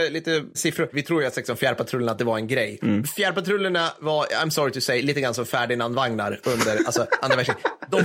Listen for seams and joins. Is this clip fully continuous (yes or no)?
no